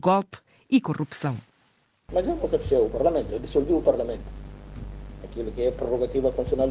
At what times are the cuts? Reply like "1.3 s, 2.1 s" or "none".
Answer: none